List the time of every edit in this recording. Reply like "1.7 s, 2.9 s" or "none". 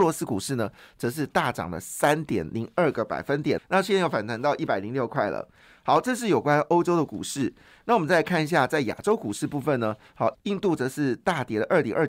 3.6 s, 10.3 s